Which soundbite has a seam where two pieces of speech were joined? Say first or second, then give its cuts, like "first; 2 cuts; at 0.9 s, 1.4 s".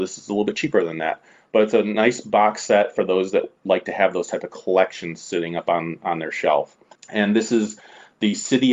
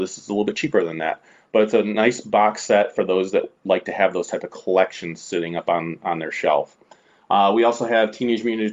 first; 1 cut; at 7.0 s